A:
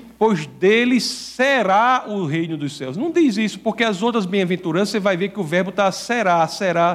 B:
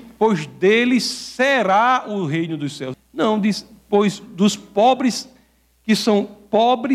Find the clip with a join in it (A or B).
B